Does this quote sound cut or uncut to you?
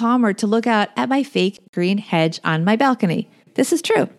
uncut